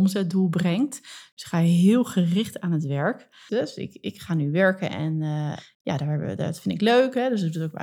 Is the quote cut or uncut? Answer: cut